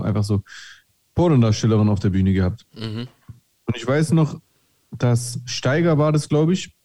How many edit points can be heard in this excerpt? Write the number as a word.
zero